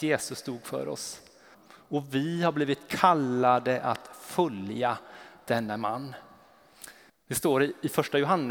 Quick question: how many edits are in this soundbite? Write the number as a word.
two